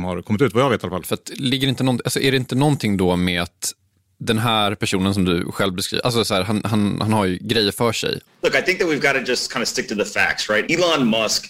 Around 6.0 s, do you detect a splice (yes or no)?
no